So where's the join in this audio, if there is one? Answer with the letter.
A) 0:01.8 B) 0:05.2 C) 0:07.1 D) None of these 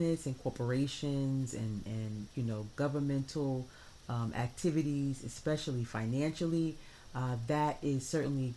D